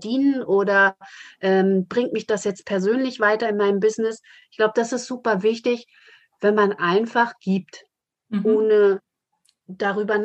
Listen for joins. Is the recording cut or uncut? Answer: uncut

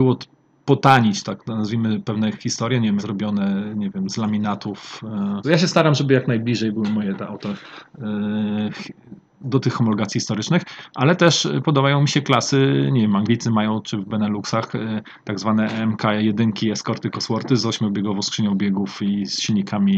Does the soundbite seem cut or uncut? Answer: cut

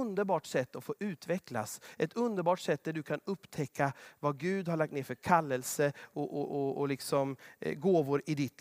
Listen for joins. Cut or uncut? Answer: uncut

